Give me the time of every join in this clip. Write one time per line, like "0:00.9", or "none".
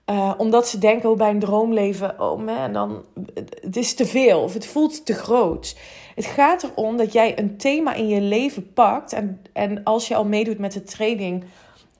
none